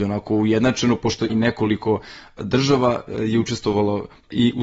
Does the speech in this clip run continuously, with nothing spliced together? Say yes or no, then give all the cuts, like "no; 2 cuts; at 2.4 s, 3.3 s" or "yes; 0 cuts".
no; 1 cut; at 2.4 s